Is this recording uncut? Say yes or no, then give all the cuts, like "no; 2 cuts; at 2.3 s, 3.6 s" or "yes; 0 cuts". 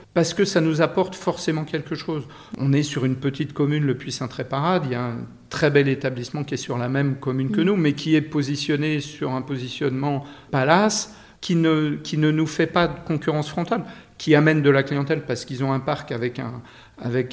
yes; 0 cuts